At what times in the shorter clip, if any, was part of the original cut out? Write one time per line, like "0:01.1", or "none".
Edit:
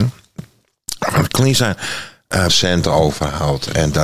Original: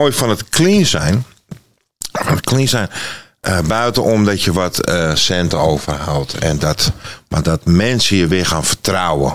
0:02.5

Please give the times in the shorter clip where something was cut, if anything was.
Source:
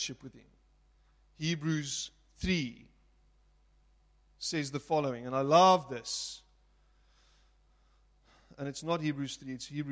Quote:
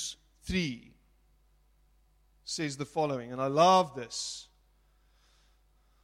none

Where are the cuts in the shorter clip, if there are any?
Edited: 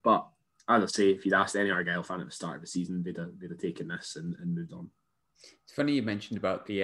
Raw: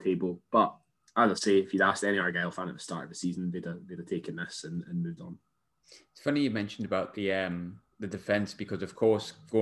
none

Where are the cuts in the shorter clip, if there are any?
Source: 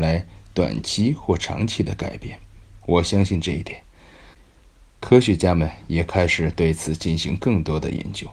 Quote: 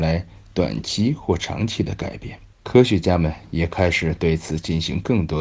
0:02.5

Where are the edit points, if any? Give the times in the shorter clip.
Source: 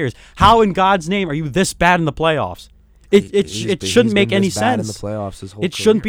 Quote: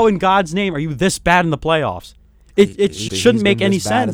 0:03.1

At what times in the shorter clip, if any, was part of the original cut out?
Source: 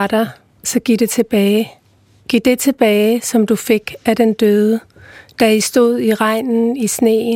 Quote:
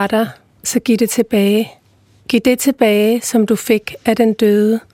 none

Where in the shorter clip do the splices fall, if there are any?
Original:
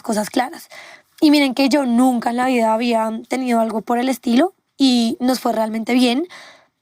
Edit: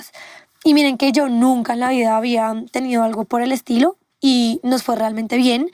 none

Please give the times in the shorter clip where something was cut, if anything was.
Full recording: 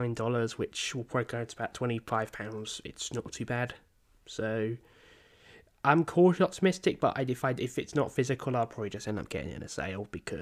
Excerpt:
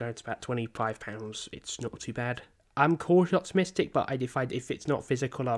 0:02.6

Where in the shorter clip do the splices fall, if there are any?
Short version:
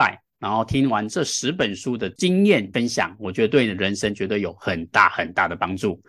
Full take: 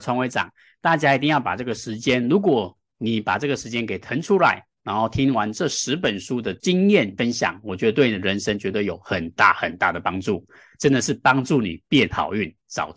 none

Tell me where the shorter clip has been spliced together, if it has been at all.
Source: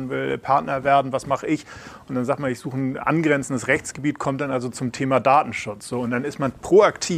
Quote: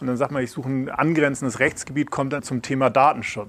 0:02.4

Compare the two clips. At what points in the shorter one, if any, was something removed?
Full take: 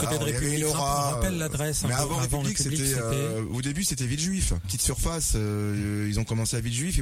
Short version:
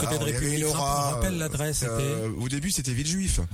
0:01.8

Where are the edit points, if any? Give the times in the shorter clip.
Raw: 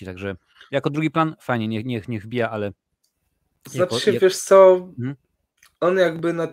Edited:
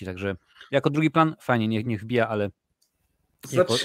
0:01.8

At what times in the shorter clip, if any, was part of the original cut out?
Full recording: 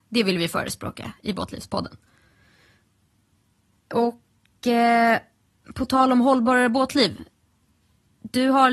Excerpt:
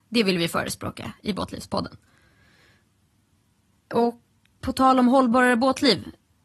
0:04.6

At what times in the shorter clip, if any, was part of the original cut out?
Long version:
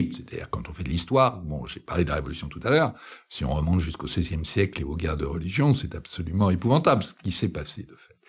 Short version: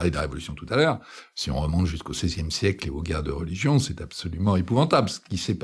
none

